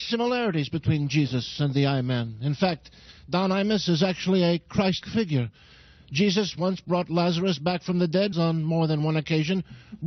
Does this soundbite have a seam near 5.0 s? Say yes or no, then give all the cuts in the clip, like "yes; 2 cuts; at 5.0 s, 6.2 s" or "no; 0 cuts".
yes; 2 cuts; at 5.0 s, 8.3 s